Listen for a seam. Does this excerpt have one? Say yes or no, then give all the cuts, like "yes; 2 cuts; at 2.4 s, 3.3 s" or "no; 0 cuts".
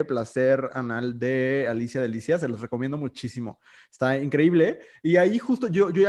no; 0 cuts